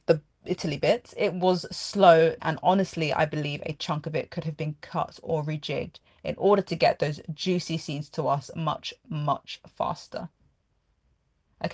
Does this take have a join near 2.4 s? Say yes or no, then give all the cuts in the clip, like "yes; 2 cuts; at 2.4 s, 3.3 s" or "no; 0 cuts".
yes; 1 cut; at 2.4 s